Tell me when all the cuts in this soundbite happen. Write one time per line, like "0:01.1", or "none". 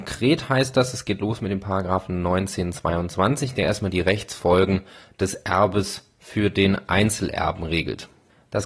none

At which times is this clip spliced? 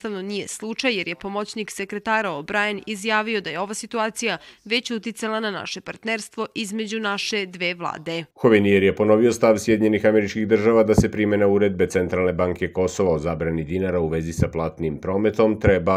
0:08.3

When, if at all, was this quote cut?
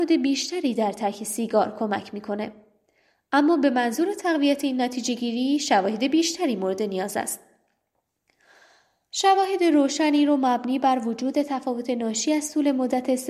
none

